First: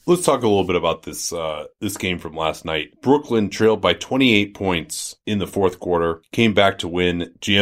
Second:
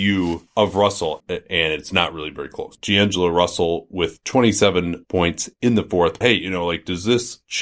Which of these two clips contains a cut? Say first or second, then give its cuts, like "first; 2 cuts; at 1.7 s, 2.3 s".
second; 3 cuts; at 1.2 s, 2.8 s, 6.2 s